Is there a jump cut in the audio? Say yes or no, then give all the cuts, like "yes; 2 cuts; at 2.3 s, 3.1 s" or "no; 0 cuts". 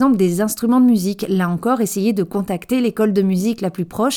no; 0 cuts